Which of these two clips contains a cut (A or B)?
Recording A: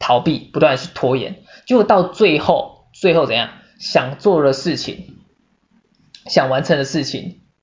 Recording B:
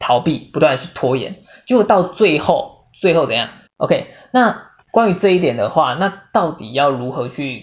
B